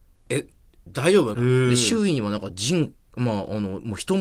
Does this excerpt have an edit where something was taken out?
yes; 1 cut; at 1.3 s

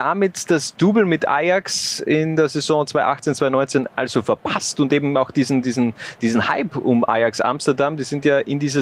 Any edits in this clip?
no; 0 cuts

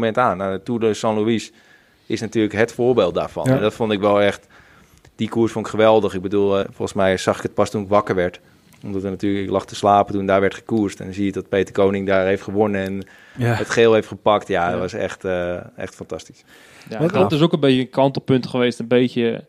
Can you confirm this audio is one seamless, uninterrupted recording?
no; 1 cut; at 6.6 s

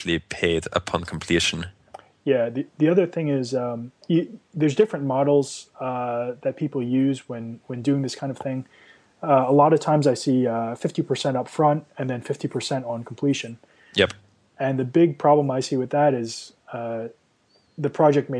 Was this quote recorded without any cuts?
yes; 0 cuts

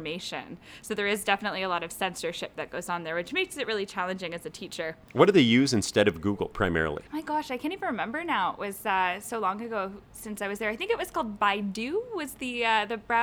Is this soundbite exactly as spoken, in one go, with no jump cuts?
no; 1 cut; at 7.1 s

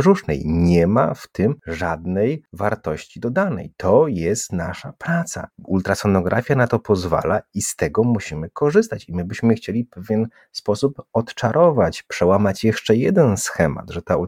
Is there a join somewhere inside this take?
no; 0 cuts

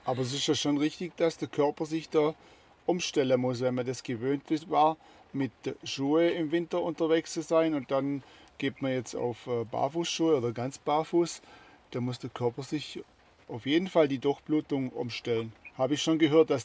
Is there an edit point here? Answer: no; 0 cuts

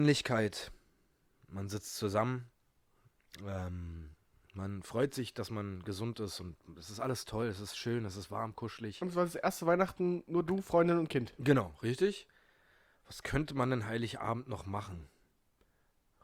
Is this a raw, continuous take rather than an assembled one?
yes; 0 cuts

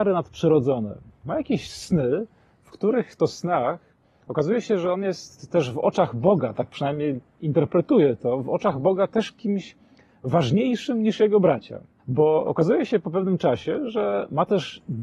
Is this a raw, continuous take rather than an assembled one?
no; 1 cut; at 12.0 s

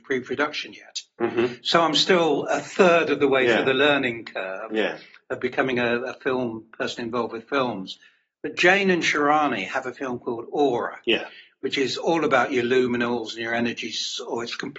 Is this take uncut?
yes; 0 cuts

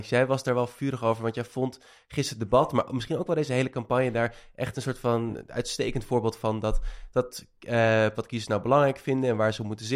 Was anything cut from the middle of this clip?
yes; 1 cut; at 8.1 s

